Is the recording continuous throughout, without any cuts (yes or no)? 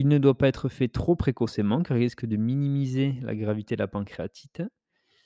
yes